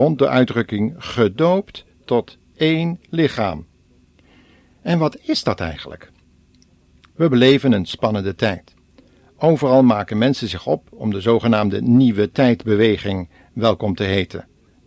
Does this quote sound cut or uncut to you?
uncut